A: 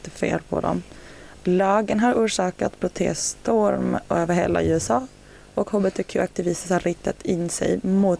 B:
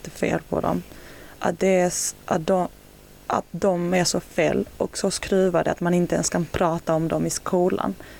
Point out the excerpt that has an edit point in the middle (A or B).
A